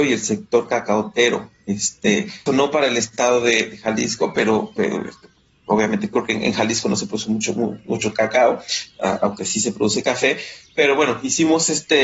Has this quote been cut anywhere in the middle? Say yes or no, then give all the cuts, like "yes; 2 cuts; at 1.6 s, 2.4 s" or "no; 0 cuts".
yes; 1 cut; at 2.5 s